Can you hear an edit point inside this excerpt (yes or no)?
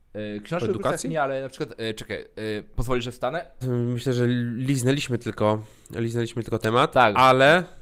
yes